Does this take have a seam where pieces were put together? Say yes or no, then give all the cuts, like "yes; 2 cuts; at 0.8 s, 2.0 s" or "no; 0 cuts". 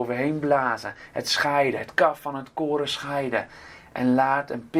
no; 0 cuts